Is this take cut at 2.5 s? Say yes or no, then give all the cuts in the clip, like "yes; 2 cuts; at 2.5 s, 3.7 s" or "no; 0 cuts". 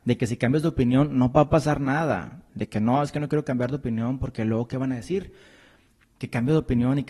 yes; 1 cut; at 2.5 s